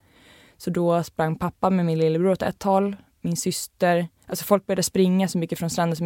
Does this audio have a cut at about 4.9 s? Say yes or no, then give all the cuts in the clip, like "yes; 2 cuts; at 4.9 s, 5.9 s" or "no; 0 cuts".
no; 1 cut; at 3.1 s